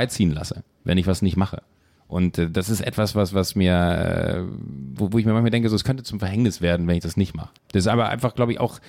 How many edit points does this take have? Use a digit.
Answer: 1